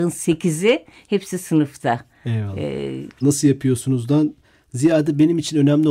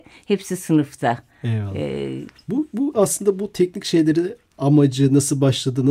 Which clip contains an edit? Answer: first; 1 cut; at 3.2 s

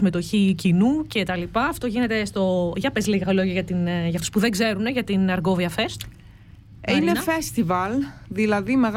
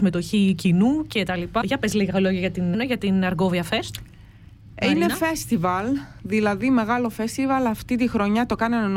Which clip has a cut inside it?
second; 2 cuts; at 1.6 s, 2.7 s

